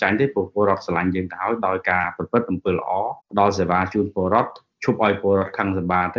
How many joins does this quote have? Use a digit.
1